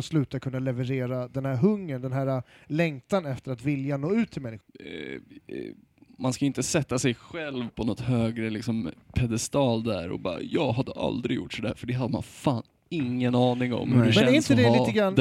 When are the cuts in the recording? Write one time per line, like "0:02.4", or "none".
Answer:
0:04.6